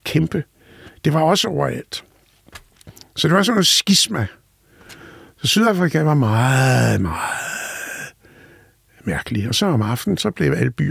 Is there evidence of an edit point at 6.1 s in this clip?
no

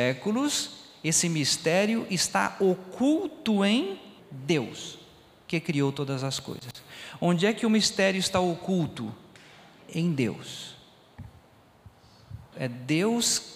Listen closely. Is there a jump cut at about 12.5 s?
yes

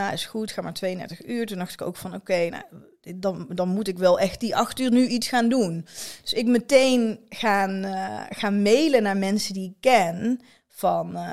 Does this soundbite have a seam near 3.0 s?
no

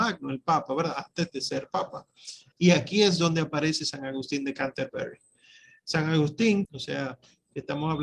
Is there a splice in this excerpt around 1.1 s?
no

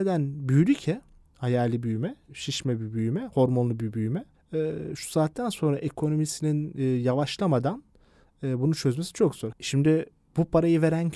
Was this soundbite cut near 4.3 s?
no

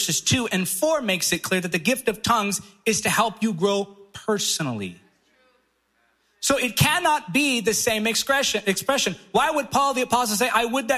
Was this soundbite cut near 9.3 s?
no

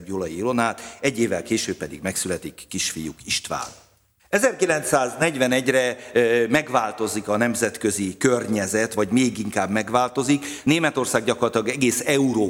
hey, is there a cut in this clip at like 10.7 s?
no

